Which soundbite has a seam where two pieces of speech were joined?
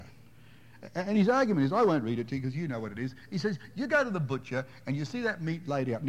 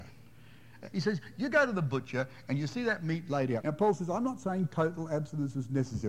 second; 2 cuts; at 0.9 s, 3.6 s

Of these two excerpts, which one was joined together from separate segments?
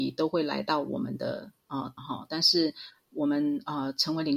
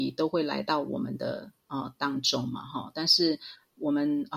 first; 1 cut; at 2.0 s

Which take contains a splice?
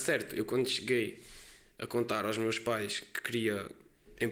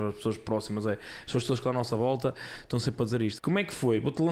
second; 1 cut; at 3.4 s

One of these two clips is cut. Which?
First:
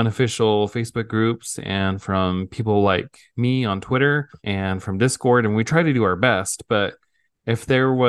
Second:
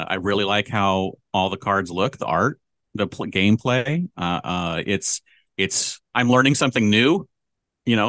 first; 1 cut; at 4.4 s

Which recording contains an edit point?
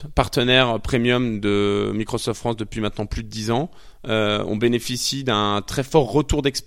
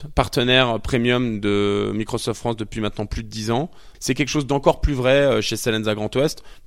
second; 1 cut; at 3.9 s

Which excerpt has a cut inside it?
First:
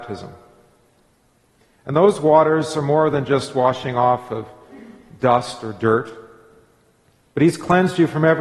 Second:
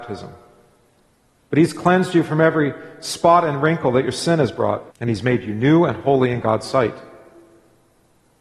second; 2 cuts; at 1.4 s, 4.9 s

